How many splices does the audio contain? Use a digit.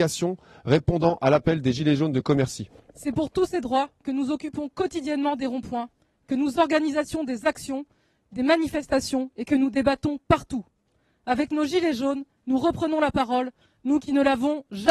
1